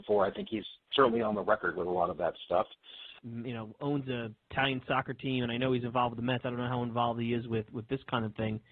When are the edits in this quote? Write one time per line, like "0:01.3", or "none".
0:03.2